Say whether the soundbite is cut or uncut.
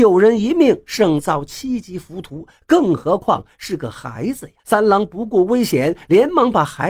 cut